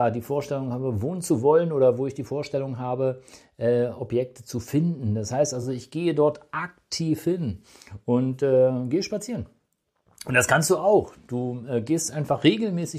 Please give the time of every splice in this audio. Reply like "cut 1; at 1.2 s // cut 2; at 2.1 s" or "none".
none

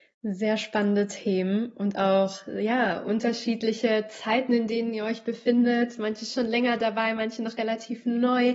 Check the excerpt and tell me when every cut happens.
none

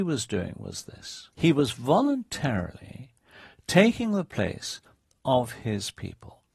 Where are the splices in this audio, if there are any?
cut 1; at 1.3 s

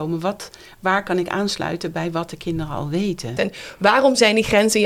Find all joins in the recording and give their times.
cut 1; at 3.4 s

